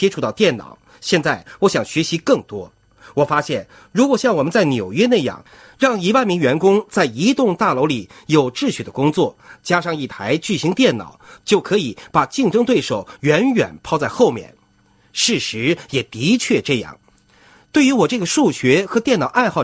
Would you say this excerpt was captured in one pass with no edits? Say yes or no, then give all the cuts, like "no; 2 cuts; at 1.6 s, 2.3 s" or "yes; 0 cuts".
yes; 0 cuts